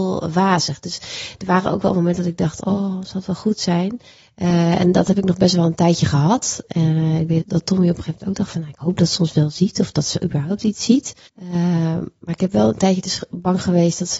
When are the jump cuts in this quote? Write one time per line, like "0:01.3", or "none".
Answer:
0:07.4
0:11.3